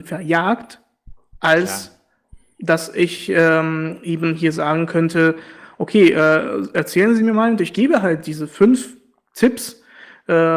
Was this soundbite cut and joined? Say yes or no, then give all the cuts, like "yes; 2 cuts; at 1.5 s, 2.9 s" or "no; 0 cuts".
no; 0 cuts